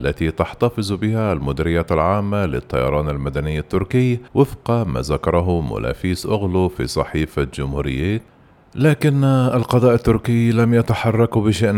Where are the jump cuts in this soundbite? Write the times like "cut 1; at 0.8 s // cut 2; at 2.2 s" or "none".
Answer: cut 1; at 4.3 s